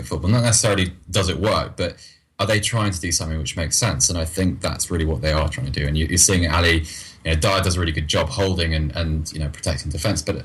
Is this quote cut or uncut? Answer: uncut